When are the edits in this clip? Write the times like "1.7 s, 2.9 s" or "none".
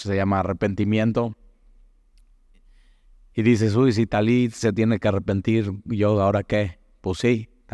none